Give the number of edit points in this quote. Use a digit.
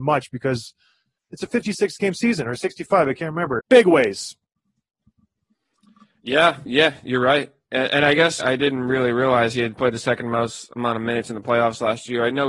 3